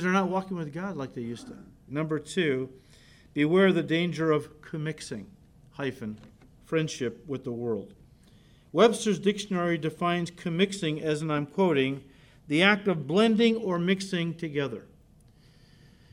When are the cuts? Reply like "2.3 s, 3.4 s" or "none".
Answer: 1.9 s